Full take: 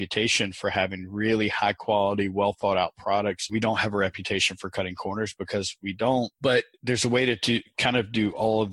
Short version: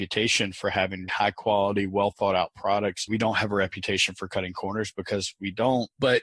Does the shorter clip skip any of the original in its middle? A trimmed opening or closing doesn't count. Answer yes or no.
yes